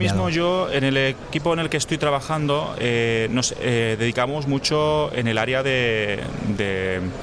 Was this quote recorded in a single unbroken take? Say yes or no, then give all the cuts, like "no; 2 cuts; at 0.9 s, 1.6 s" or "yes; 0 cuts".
yes; 0 cuts